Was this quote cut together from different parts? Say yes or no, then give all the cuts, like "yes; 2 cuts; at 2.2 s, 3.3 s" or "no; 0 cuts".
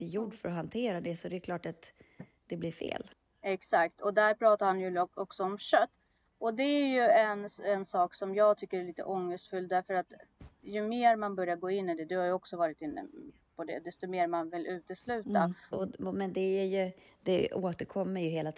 yes; 1 cut; at 15.7 s